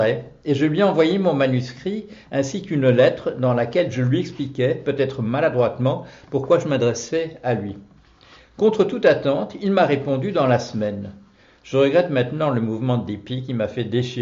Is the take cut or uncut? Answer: uncut